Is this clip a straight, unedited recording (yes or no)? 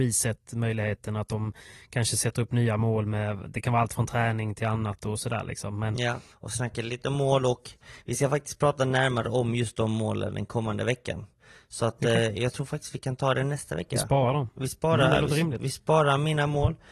no